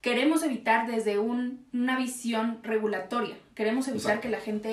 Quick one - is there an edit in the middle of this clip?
no; 0 cuts

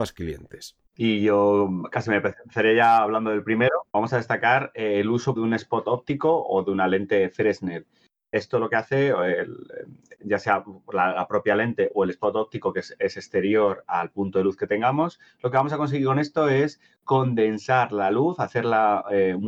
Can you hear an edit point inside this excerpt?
yes; 2 cuts; at 3.9 s, 5.4 s

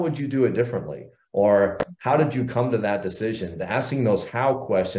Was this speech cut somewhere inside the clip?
no; 0 cuts

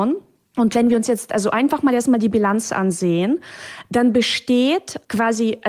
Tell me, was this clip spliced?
no; 0 cuts

